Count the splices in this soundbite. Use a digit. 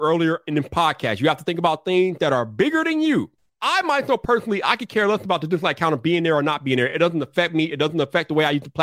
0